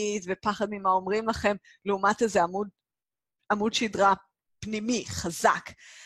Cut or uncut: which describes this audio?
uncut